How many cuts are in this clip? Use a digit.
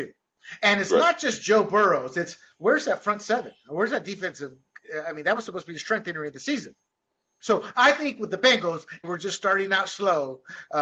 2